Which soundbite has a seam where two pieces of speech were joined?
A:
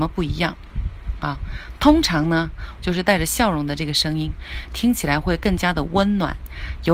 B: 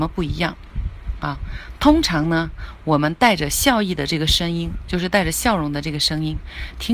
A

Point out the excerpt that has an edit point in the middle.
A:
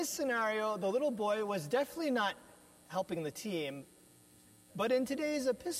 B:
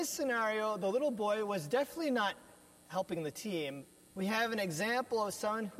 B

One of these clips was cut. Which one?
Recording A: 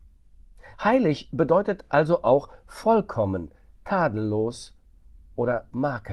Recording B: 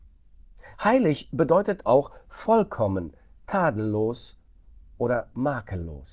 B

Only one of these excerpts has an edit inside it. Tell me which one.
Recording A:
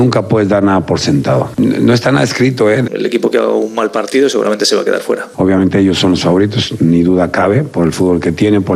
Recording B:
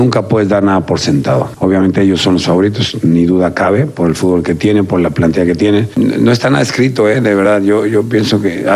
A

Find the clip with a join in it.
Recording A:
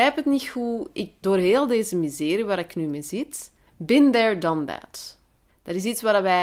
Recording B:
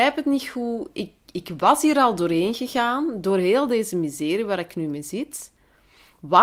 A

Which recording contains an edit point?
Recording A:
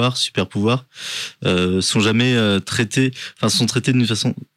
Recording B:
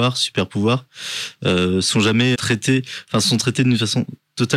B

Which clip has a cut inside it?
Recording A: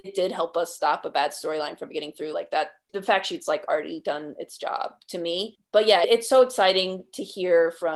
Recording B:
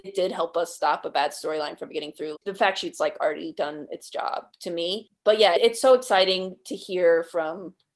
B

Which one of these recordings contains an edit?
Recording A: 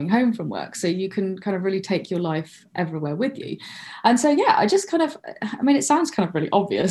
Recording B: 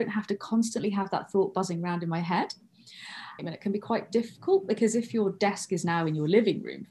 B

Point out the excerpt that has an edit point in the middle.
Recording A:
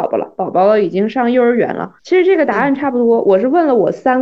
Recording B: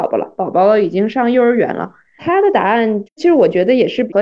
A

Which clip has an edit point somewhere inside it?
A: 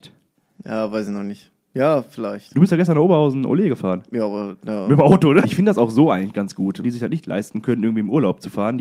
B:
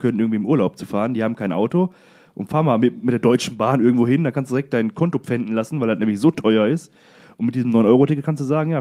A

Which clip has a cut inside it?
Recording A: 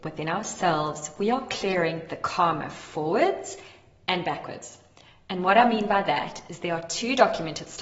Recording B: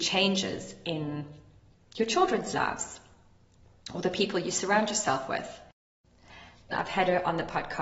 B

